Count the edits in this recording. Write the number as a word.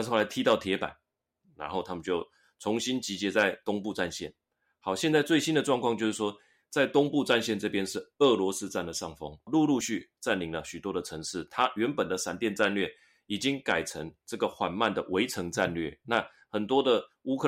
one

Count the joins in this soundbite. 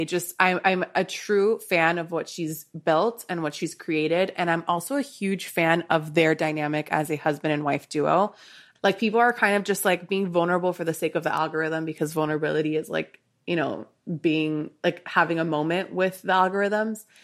one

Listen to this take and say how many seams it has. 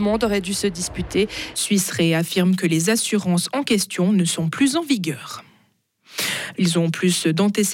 two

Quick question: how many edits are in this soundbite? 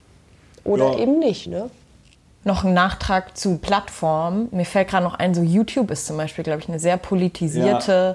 zero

